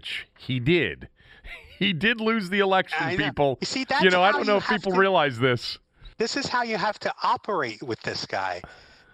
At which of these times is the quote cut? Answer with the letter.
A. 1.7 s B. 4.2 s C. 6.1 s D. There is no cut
C